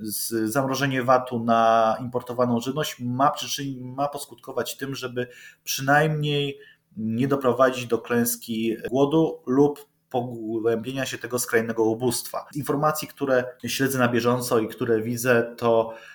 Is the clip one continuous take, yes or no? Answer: no